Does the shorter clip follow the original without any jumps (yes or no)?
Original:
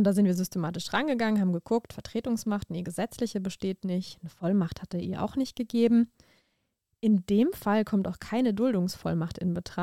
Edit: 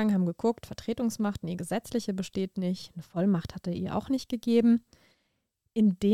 yes